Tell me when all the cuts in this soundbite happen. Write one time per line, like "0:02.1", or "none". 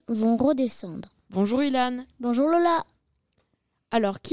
0:01.3